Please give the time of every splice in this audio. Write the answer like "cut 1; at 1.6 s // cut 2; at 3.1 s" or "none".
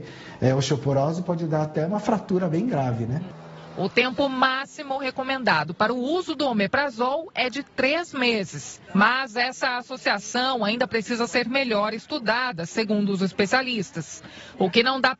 cut 1; at 8.9 s